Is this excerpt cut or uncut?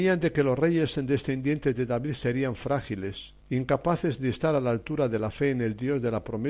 cut